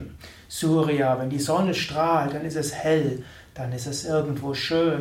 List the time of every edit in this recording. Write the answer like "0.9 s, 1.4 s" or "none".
none